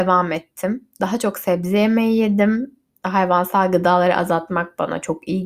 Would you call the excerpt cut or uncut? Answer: uncut